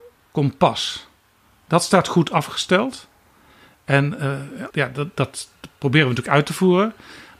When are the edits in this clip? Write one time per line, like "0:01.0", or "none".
0:04.7